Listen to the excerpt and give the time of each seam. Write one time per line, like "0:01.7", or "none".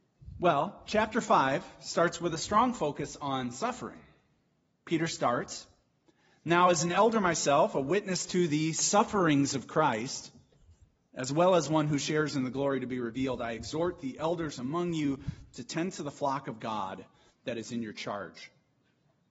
none